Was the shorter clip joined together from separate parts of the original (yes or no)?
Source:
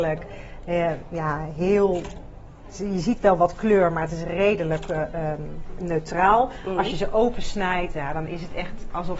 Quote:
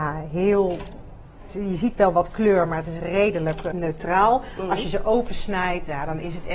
yes